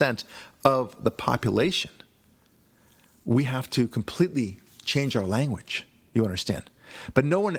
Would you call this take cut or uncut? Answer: uncut